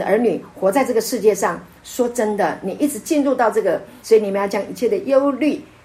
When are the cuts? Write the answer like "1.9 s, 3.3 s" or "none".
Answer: 4.0 s